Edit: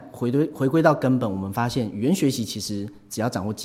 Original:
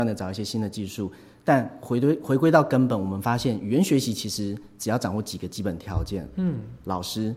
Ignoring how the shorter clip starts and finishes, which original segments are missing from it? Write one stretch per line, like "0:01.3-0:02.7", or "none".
none